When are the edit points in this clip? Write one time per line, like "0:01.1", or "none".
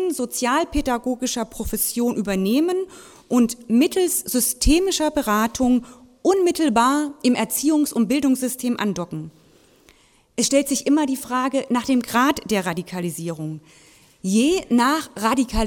none

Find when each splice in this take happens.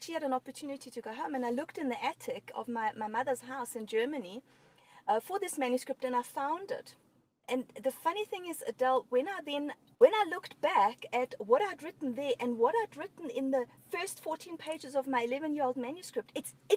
0:09.9
0:13.8

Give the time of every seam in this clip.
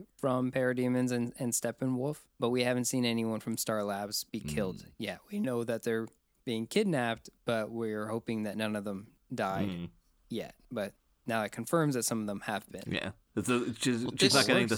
0:02.3

